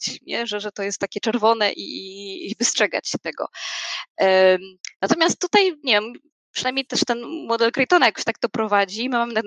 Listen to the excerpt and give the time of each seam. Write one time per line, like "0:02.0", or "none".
none